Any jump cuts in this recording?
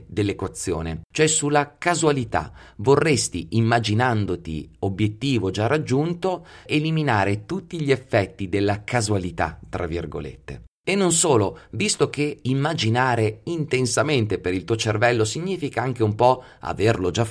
yes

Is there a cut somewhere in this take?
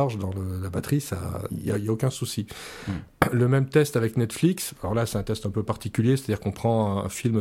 yes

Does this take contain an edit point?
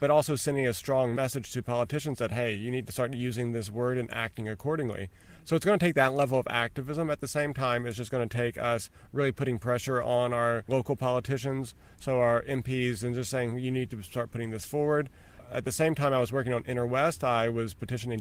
no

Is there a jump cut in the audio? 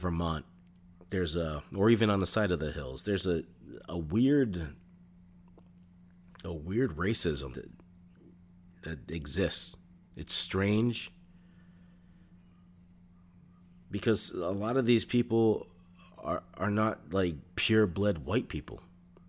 yes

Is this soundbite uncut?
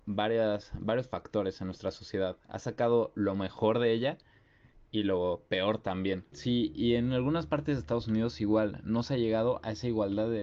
no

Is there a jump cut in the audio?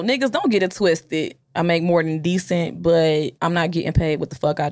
yes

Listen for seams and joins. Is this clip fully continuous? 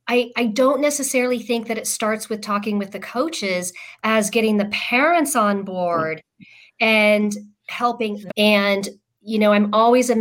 no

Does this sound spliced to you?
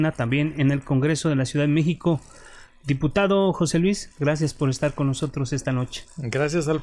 no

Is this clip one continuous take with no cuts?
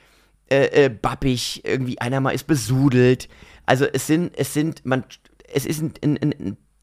yes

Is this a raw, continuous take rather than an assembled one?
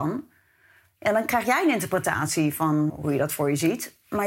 no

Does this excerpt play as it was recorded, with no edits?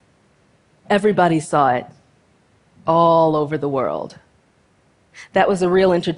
yes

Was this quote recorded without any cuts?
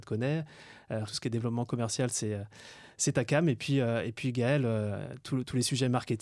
no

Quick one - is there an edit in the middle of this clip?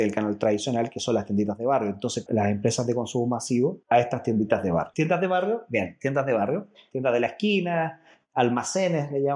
yes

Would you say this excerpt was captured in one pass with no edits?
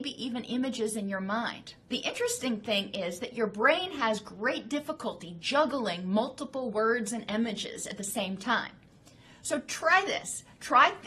no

